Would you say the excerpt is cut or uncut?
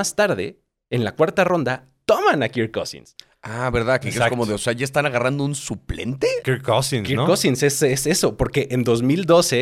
cut